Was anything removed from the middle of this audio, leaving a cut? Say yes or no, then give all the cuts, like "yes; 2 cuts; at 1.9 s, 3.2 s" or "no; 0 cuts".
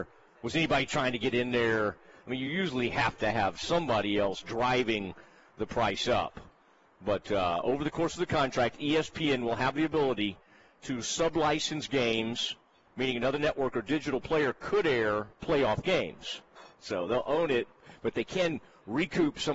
yes; 2 cuts; at 15.3 s, 16.7 s